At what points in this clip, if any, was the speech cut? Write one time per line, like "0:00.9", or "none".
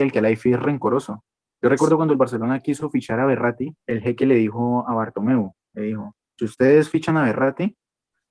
0:03.8